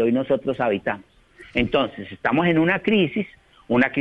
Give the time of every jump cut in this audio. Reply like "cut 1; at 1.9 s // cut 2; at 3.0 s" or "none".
none